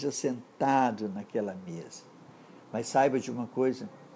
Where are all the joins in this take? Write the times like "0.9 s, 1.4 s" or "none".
none